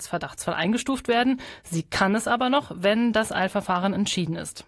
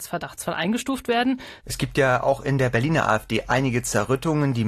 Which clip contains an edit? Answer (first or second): second